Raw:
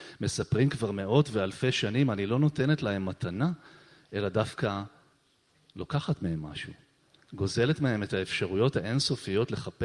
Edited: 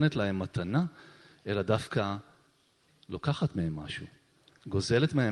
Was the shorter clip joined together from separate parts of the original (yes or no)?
no